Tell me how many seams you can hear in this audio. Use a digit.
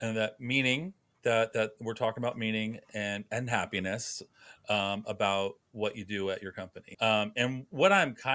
1